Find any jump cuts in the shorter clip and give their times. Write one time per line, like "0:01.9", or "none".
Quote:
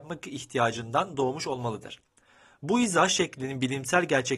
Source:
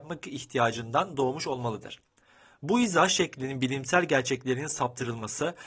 none